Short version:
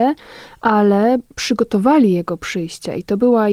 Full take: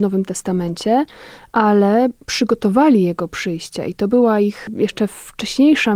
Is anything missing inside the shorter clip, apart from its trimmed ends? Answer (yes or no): no